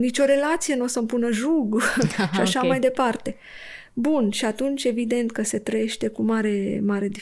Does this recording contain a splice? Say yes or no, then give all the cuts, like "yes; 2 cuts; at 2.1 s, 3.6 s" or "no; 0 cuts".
no; 0 cuts